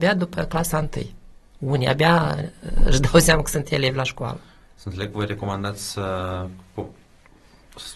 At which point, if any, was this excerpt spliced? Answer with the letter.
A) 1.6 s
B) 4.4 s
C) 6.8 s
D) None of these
D